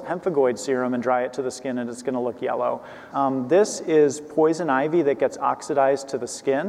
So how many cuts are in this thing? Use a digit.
1